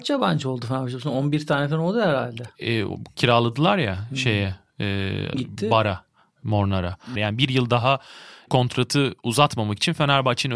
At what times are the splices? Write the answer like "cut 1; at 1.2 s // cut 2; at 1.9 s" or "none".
cut 1; at 5.3 s // cut 2; at 7.2 s